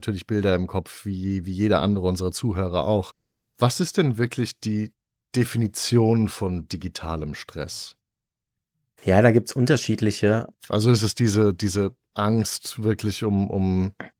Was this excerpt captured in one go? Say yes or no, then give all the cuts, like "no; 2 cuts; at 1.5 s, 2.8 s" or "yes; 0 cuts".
no; 1 cut; at 10.6 s